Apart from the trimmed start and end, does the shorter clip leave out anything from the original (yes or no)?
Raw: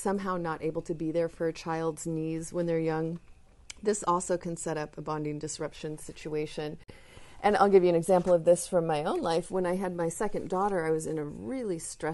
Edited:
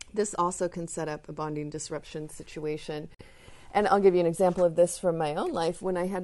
no